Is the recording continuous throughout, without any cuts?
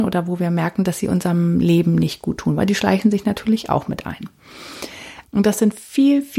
no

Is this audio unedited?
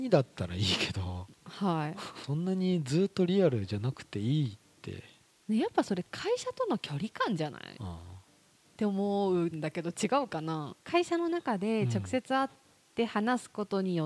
yes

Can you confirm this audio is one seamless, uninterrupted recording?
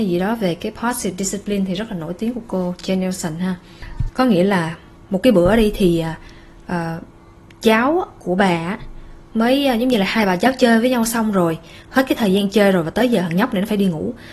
no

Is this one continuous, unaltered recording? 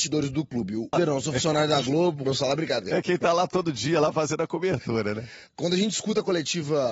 no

